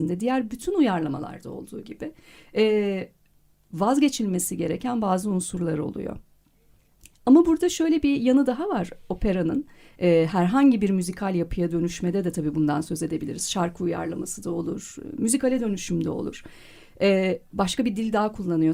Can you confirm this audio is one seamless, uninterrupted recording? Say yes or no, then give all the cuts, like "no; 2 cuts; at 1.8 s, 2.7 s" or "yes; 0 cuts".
yes; 0 cuts